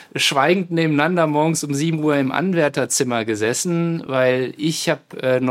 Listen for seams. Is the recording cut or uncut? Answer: uncut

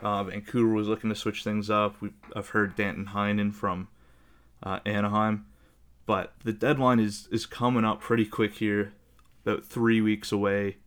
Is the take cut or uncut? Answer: uncut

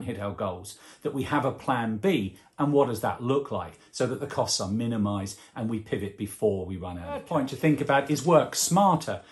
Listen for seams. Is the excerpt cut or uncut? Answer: uncut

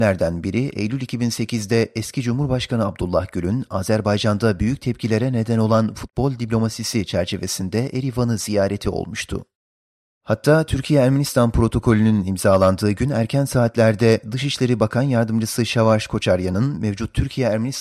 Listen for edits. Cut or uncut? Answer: cut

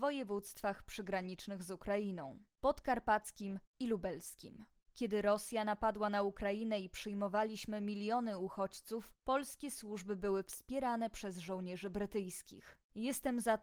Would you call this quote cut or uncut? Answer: uncut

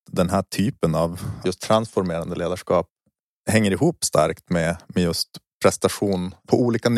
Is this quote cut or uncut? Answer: cut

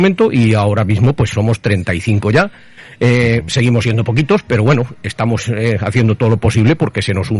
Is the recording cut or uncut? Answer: uncut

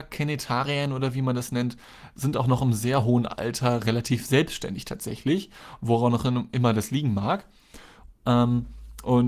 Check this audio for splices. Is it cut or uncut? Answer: cut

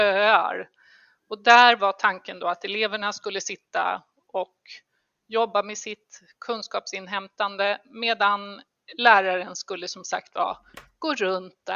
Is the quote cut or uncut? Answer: uncut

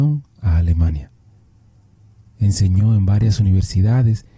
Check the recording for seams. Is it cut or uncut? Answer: uncut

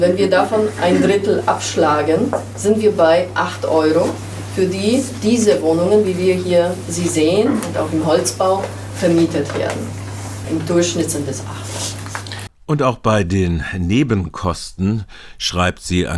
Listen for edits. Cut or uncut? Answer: cut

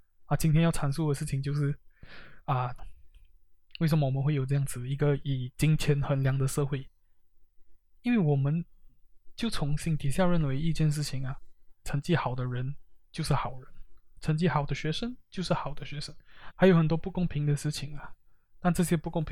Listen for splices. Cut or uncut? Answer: cut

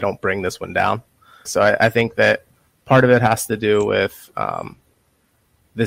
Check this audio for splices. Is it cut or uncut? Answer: cut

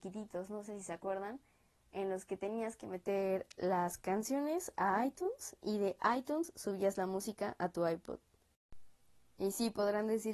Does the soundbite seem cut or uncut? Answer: uncut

